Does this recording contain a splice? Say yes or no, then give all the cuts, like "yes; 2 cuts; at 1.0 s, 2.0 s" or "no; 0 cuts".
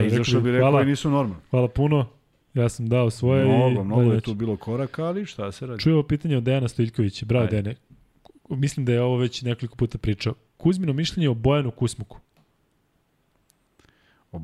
no; 0 cuts